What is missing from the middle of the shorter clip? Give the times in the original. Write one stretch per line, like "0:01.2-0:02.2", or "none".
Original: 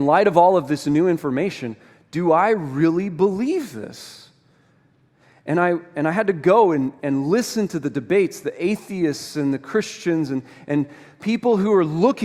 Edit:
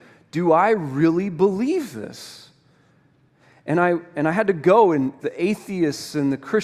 0:07.0-0:08.4